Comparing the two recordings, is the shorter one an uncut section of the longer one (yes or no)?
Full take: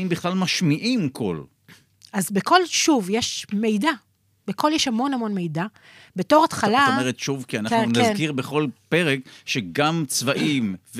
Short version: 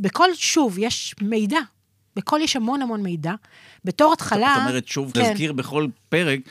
no